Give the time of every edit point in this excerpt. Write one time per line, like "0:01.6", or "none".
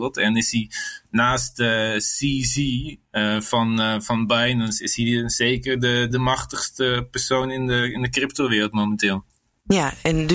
0:06.1